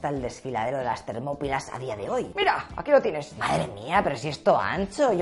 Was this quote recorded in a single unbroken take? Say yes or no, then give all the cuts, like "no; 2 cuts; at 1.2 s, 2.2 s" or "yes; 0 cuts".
yes; 0 cuts